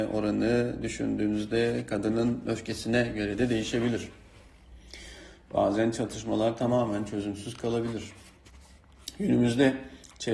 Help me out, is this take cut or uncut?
uncut